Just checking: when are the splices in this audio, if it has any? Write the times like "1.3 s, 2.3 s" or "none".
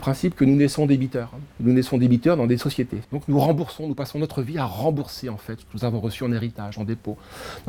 1.5 s, 3.0 s